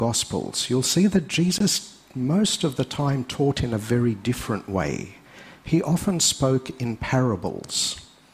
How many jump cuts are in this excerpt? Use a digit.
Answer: 0